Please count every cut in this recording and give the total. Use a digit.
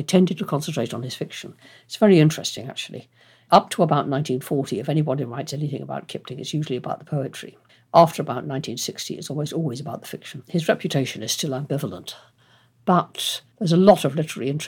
1